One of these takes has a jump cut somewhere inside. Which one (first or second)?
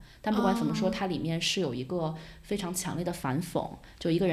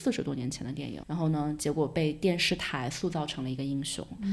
second